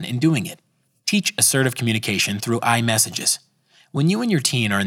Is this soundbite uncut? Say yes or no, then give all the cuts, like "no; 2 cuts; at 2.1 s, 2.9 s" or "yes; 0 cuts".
yes; 0 cuts